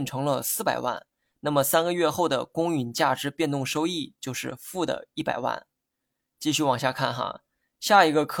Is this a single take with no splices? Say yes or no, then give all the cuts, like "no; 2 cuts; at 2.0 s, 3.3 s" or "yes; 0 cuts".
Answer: yes; 0 cuts